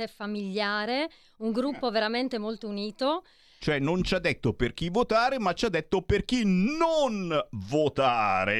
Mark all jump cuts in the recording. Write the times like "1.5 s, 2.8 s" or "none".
3.6 s

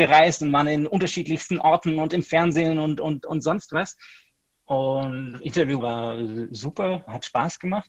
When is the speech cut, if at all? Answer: 4.5 s, 5.8 s

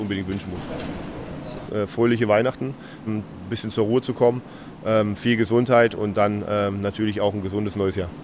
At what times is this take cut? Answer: 1.7 s, 3.1 s

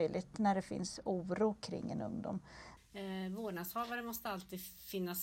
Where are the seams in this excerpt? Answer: 2.8 s

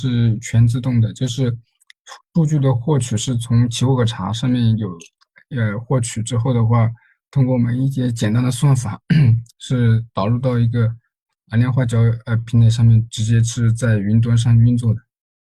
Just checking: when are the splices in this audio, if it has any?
12.5 s

